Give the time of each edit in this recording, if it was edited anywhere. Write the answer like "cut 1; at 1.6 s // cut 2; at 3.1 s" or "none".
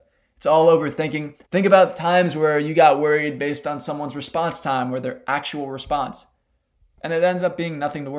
cut 1; at 1.5 s